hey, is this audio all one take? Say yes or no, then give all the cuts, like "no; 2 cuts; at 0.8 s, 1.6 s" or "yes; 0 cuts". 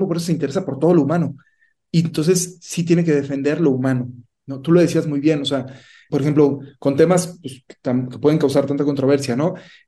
no; 1 cut; at 6.1 s